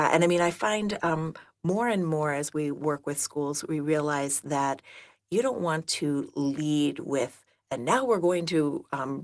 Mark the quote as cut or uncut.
uncut